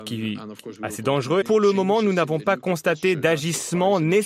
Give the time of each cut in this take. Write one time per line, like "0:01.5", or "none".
0:01.4

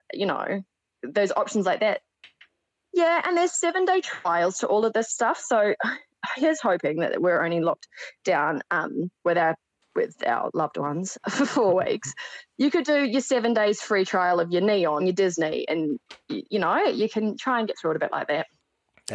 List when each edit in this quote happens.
0:11.2
0:15.0

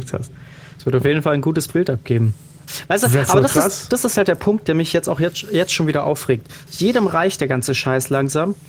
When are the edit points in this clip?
0:06.7

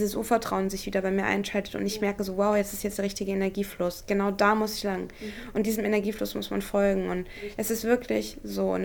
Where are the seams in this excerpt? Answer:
none

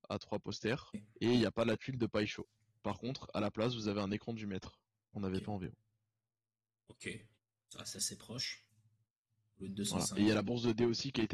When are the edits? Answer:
none

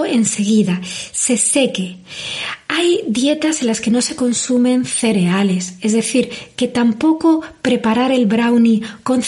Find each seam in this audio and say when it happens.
none

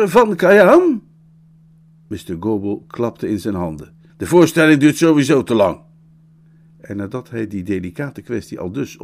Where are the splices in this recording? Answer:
0:04.1

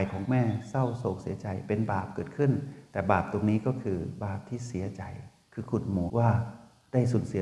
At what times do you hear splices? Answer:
0:06.1

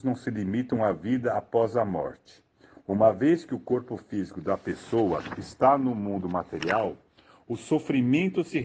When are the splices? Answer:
none

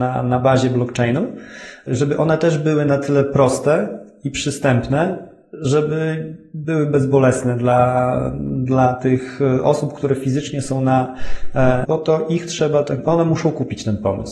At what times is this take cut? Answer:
0:11.8

